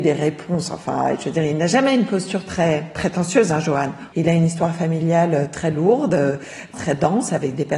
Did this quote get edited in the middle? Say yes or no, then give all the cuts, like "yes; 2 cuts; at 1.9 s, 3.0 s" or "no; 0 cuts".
yes; 2 cuts; at 4.1 s, 6.7 s